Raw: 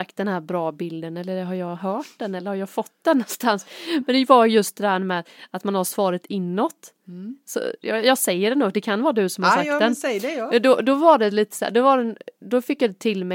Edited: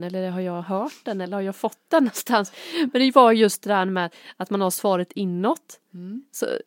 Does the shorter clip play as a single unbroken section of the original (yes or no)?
yes